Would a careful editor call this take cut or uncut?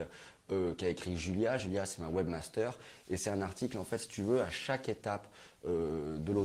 uncut